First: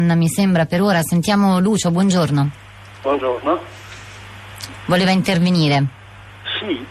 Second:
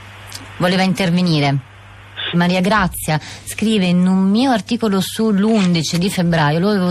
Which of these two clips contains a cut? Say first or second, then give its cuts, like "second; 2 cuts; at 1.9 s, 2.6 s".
second; 1 cut; at 2.3 s